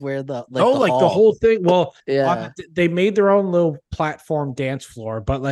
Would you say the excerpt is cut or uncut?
uncut